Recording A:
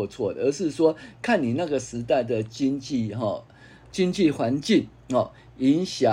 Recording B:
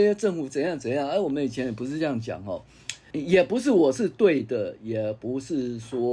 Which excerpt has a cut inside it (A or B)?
B